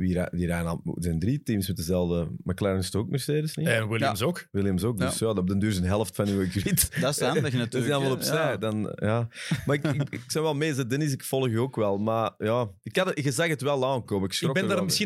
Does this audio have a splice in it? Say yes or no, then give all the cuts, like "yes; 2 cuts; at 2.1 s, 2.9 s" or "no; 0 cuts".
no; 0 cuts